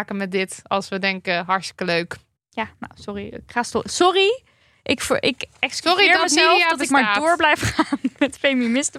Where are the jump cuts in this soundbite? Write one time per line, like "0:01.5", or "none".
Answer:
0:02.4